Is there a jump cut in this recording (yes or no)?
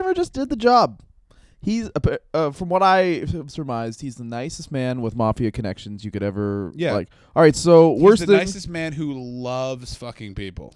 no